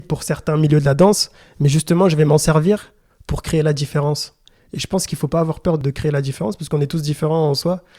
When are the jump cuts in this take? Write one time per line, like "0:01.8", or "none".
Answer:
none